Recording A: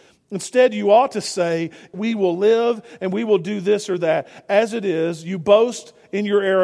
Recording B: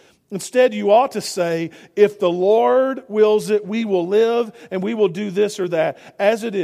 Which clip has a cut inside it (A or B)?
A